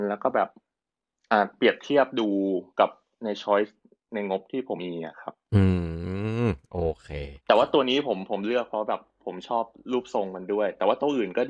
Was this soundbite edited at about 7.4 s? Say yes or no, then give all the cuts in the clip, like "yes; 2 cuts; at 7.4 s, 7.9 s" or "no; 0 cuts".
yes; 2 cuts; at 4.8 s, 7.4 s